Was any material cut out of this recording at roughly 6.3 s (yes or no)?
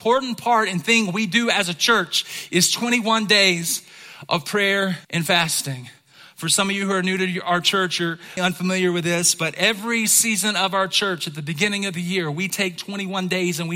no